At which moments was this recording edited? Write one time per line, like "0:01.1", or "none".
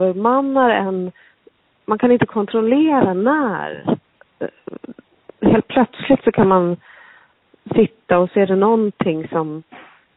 none